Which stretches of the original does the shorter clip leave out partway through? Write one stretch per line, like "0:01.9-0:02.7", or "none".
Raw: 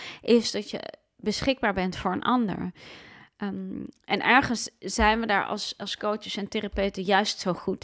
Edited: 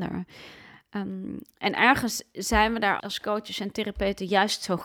0:05.5-0:05.8